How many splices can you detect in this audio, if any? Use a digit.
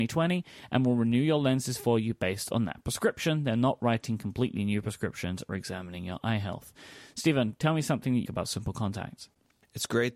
1